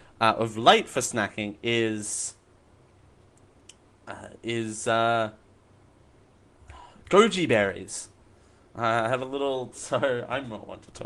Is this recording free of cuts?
no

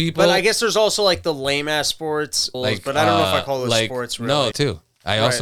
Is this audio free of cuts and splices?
no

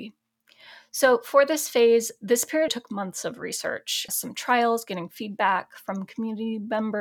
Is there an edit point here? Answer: yes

